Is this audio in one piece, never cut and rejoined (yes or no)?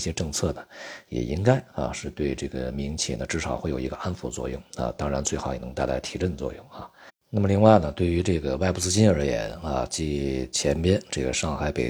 yes